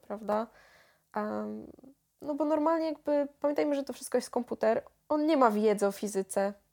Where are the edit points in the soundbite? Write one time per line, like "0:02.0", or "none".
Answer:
none